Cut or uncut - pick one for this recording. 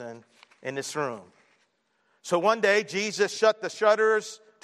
uncut